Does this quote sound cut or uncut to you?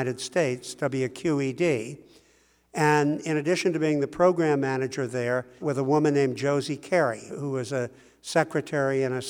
cut